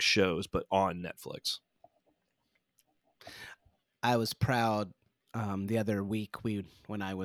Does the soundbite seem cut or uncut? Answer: uncut